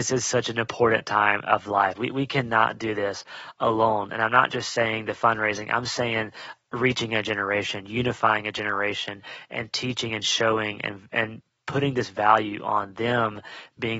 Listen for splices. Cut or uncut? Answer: cut